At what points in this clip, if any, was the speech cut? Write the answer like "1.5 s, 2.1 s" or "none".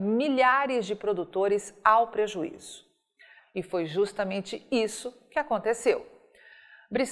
3.4 s